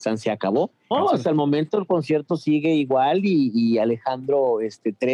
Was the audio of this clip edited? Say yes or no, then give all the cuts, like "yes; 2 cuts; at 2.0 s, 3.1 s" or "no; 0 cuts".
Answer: yes; 1 cut; at 0.9 s